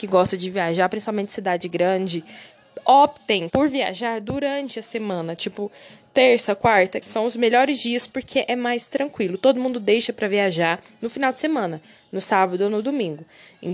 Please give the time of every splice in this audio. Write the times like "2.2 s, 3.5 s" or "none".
3.5 s, 7.0 s